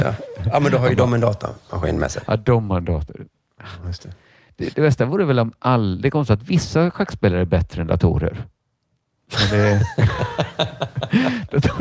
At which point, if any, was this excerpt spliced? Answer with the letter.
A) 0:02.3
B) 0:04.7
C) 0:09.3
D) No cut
B